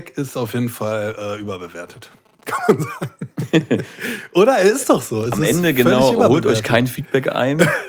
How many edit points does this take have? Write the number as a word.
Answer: zero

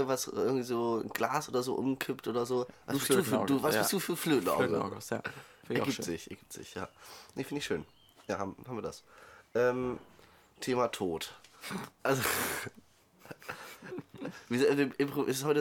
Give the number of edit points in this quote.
zero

